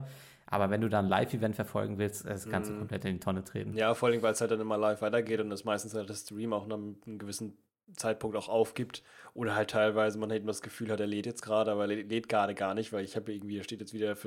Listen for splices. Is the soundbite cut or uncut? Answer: uncut